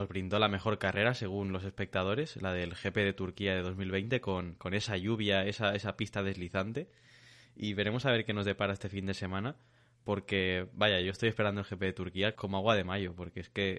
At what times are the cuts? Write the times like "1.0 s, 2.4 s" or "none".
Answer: 12.4 s